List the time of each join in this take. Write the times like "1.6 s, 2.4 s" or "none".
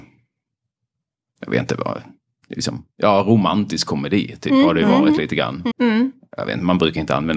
5.7 s